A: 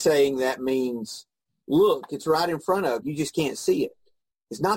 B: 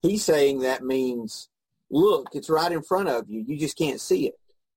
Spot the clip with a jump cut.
A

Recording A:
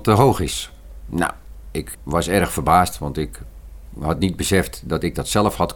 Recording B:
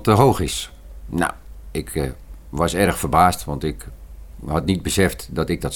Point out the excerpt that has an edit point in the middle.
A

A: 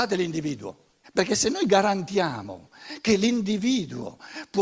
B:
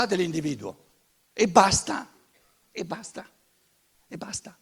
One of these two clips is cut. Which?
A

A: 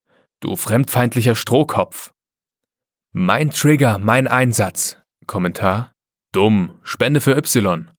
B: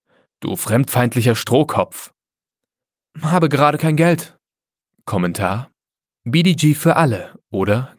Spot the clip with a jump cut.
A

